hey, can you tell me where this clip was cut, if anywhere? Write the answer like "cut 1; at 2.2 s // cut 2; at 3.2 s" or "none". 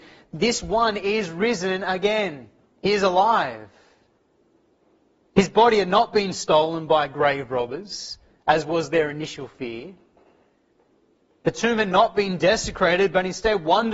none